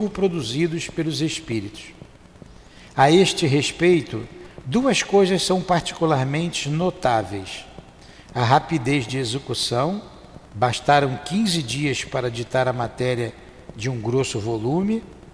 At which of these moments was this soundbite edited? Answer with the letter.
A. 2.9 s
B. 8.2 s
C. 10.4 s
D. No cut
C